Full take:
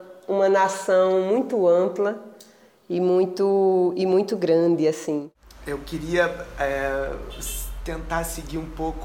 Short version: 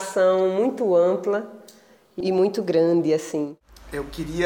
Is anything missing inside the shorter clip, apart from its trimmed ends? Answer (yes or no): yes